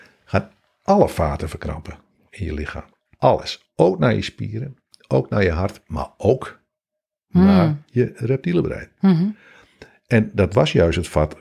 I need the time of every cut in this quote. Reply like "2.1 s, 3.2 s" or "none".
none